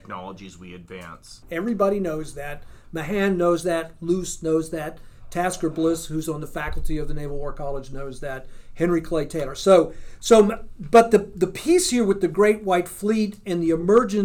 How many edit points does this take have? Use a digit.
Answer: 1